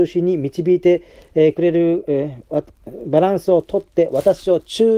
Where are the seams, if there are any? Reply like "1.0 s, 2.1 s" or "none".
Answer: none